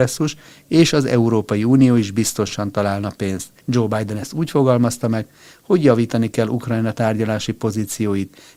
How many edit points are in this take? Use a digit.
1